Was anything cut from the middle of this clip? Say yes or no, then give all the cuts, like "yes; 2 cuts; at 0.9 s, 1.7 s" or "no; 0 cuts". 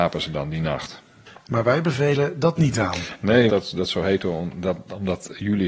yes; 2 cuts; at 1.5 s, 3.5 s